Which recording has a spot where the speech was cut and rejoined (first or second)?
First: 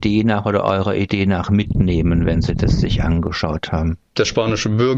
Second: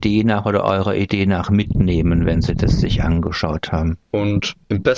second